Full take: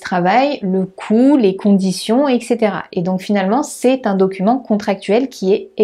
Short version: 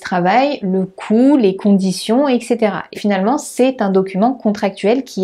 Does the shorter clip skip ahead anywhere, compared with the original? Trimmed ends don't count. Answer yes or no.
yes